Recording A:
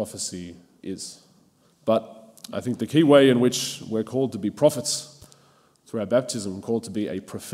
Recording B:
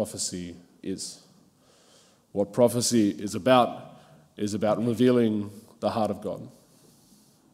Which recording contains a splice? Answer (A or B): A